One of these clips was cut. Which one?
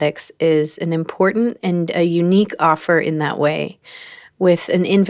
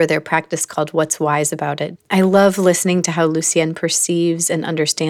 second; 1 cut; at 2.0 s

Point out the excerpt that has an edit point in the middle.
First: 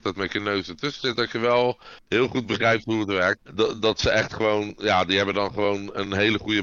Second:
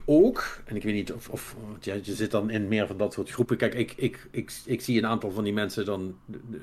first; 1 cut; at 3.4 s

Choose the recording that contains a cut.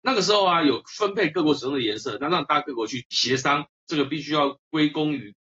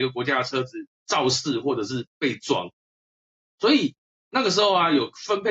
first; 1 cut; at 3.8 s

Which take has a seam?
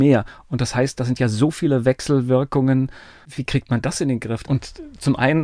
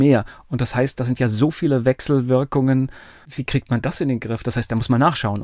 first; 1 cut; at 4.4 s

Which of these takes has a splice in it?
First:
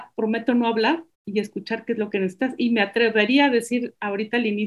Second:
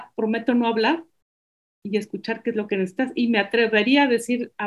first; 1 cut; at 1.1 s

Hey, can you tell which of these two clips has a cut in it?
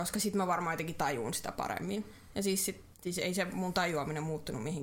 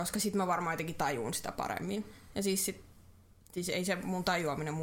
first; 1 cut; at 2.9 s

